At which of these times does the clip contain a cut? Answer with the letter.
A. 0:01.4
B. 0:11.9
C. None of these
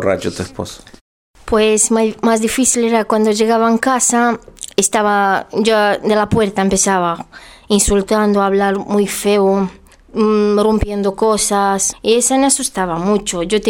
B